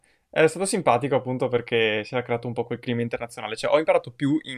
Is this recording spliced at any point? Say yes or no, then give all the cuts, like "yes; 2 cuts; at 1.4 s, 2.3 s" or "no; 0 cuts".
no; 0 cuts